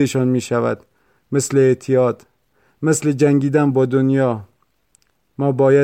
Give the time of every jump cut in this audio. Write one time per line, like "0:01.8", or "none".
none